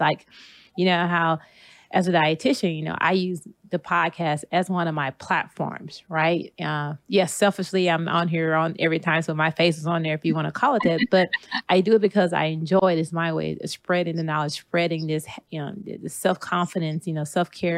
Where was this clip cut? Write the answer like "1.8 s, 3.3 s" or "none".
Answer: none